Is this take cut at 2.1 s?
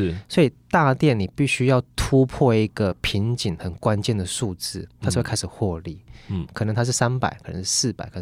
no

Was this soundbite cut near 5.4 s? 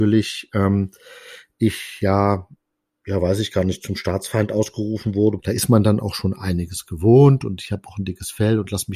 yes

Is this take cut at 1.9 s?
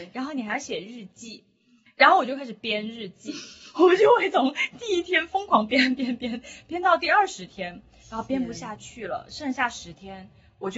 no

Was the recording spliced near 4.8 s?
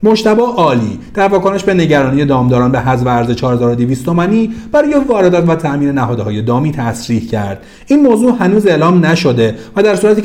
no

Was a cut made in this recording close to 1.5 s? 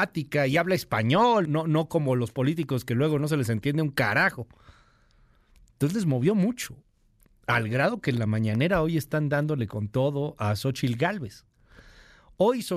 yes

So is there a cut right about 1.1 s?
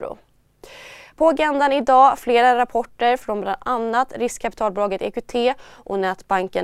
no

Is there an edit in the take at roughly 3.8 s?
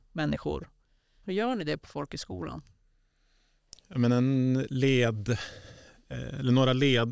no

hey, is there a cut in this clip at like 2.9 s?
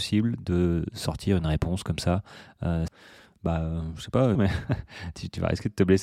yes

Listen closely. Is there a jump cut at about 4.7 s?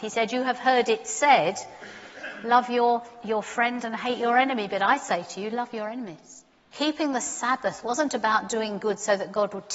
no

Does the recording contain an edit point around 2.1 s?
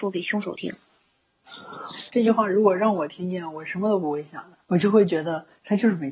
yes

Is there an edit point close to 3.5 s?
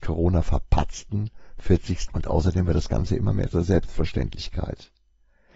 no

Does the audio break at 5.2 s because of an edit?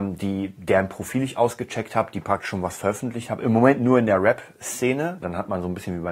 yes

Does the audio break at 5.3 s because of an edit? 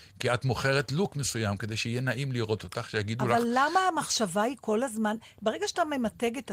no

